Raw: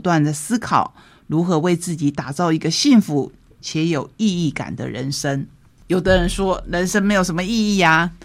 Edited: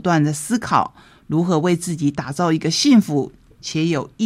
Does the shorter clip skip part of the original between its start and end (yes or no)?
no